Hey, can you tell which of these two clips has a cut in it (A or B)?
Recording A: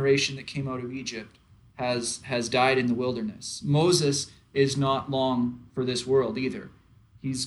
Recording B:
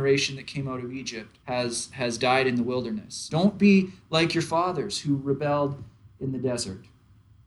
B